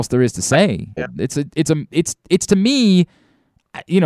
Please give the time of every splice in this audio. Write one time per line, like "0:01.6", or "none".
0:01.0